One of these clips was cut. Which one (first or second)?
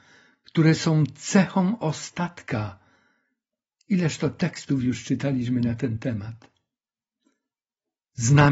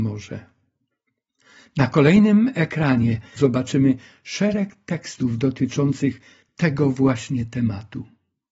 second